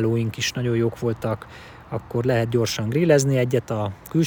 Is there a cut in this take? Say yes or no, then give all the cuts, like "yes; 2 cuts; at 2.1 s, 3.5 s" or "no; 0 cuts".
no; 0 cuts